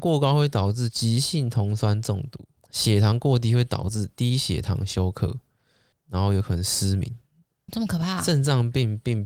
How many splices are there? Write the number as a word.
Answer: three